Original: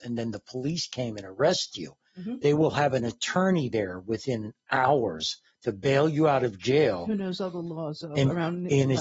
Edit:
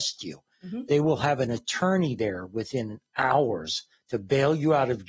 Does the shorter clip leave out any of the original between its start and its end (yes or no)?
no